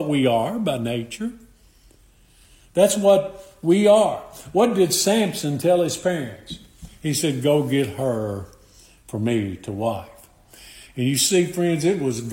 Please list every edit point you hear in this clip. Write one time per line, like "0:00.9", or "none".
none